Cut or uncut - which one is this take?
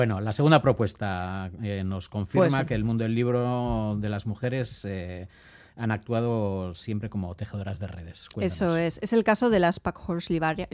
uncut